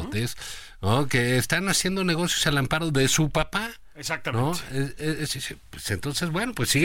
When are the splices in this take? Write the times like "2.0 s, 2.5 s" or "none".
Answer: none